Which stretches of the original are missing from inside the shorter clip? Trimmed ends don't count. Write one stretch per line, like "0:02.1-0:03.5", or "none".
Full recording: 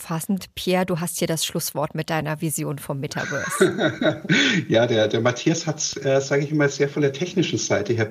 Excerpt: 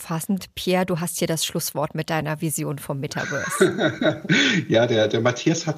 none